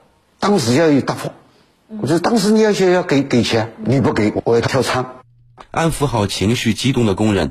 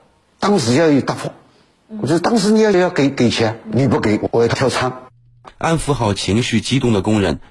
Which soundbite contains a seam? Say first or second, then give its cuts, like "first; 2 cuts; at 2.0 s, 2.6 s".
second; 1 cut; at 2.7 s